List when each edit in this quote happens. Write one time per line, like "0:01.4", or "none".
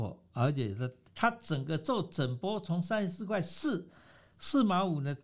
0:01.1